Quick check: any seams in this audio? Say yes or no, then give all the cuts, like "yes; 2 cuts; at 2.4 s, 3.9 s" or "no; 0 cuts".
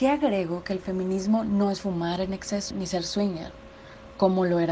yes; 1 cut; at 2.7 s